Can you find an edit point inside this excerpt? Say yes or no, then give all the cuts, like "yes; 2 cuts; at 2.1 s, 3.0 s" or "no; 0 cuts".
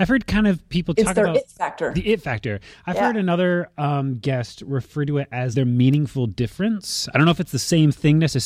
yes; 1 cut; at 5.5 s